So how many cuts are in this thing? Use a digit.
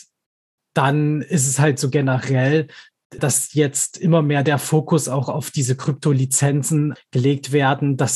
2